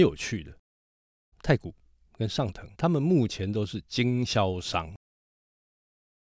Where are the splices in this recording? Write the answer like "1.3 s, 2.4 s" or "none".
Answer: 1.3 s, 2.7 s